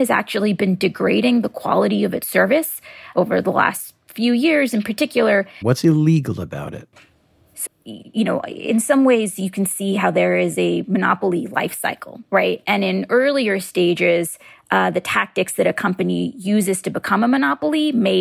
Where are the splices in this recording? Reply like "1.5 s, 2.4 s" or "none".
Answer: 5.6 s, 7.7 s